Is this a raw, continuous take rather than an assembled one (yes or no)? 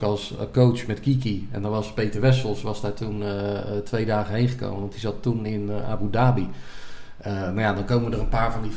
yes